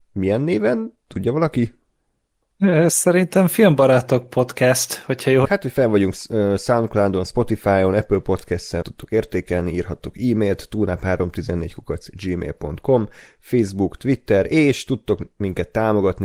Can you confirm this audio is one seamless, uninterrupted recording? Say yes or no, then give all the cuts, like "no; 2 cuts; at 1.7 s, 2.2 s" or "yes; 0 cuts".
no; 2 cuts; at 5.4 s, 8.8 s